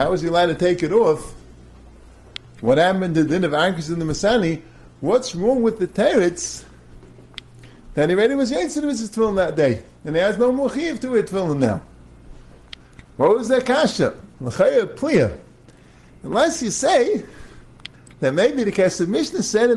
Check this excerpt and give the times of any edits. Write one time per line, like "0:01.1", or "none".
none